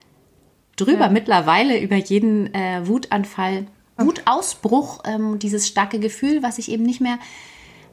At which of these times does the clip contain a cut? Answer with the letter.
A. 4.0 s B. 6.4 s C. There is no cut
A